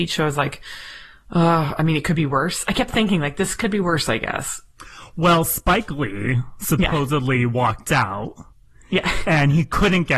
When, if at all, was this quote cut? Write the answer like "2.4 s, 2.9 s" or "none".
none

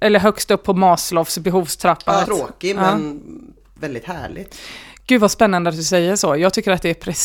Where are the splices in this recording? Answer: 2.2 s

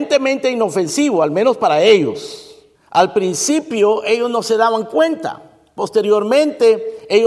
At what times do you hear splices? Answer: 2.7 s

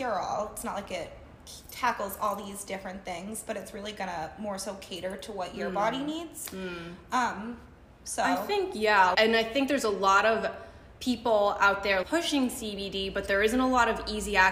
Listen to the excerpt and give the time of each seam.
9.1 s, 12.0 s

